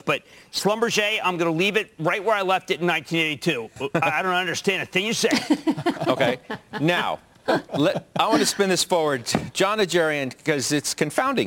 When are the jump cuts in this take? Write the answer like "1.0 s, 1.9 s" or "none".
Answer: none